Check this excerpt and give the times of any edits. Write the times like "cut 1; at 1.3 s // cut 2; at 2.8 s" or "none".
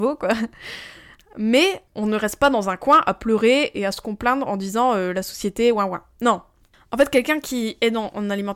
none

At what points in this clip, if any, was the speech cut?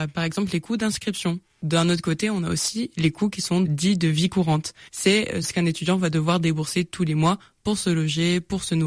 none

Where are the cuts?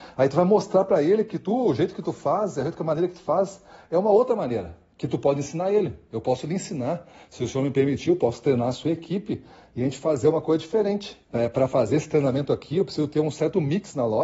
cut 1; at 11.2 s

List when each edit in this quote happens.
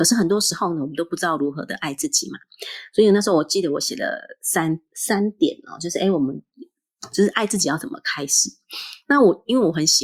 none

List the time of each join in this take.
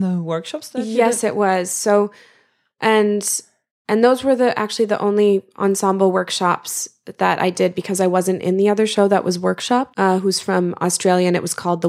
cut 1; at 9.9 s

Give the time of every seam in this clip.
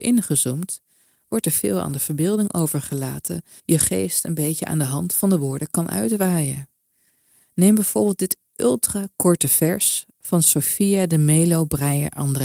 cut 1; at 3.6 s

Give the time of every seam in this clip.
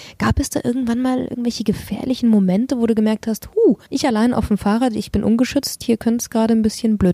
cut 1; at 3.8 s

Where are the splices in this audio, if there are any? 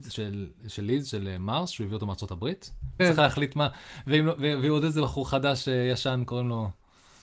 cut 1; at 3.0 s

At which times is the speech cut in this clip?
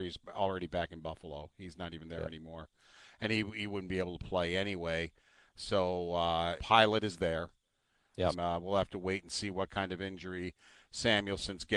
cut 1; at 6.6 s // cut 2; at 8.3 s

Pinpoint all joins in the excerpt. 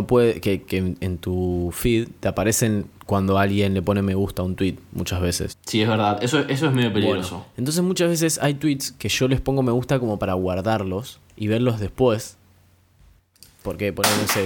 cut 1; at 5.5 s // cut 2; at 11.3 s

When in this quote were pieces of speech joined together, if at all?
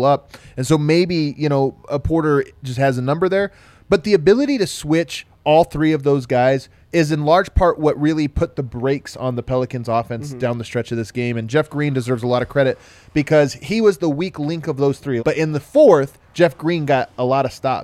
cut 1; at 15.2 s

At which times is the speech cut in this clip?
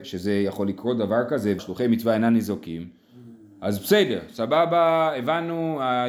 cut 1; at 1.6 s

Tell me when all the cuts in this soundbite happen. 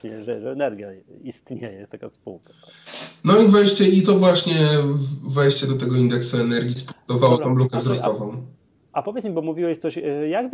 none

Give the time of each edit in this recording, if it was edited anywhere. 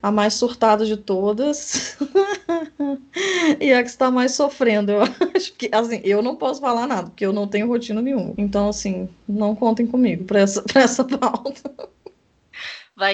cut 1; at 8.4 s

